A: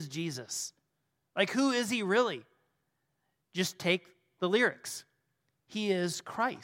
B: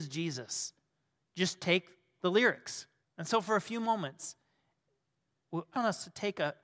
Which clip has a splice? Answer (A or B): B